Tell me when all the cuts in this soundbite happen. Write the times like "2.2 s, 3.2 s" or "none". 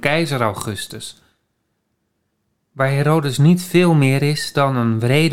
none